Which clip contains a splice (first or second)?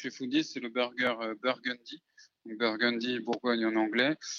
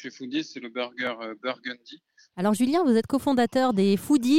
second